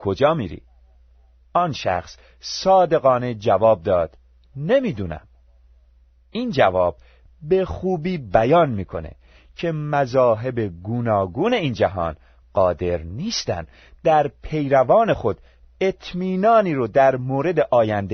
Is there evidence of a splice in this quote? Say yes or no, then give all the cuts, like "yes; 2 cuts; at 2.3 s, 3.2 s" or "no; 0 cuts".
no; 0 cuts